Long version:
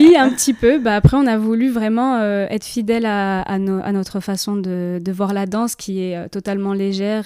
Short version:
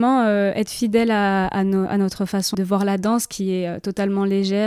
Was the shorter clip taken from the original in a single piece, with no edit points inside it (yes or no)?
no